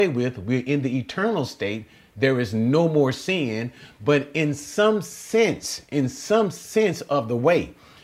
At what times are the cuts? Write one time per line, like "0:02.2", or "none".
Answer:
none